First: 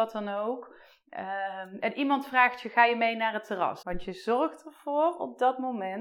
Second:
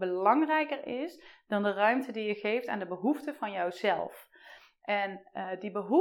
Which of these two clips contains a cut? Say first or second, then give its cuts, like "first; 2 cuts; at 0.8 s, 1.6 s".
first; 1 cut; at 3.8 s